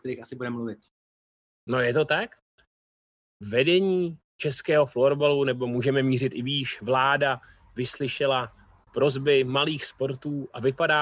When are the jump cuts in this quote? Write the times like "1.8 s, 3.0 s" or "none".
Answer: none